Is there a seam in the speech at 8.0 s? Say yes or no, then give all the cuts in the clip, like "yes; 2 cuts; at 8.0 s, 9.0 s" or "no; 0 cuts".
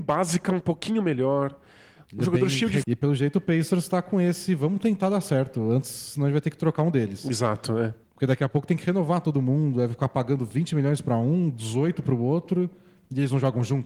yes; 2 cuts; at 2.8 s, 8.0 s